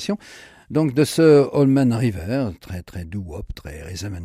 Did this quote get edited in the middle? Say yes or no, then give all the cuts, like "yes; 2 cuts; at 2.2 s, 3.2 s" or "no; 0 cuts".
no; 0 cuts